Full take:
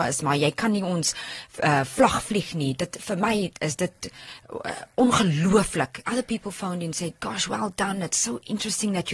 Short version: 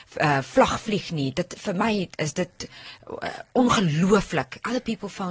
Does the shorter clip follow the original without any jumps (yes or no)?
yes